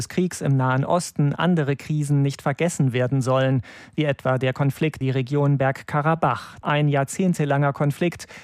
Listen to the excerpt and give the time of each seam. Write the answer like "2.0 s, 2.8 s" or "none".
5.0 s